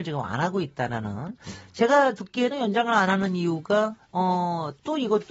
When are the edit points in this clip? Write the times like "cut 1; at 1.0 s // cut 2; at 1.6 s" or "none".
cut 1; at 4.0 s